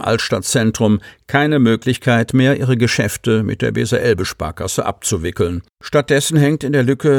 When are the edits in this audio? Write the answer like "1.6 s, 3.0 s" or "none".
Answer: 5.7 s

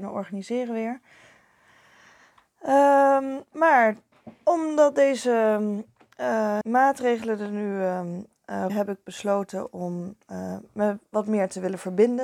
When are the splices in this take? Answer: 6.6 s, 8.7 s

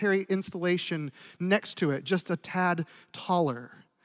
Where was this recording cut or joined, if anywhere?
none

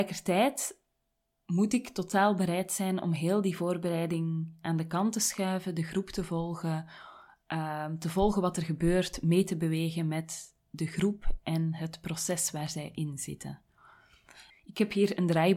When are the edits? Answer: 14.5 s

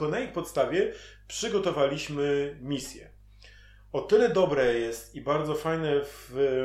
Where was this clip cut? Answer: none

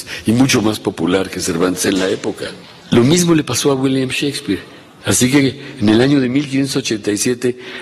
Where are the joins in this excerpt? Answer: 2.8 s, 5.0 s

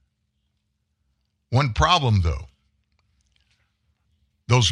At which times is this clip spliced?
none

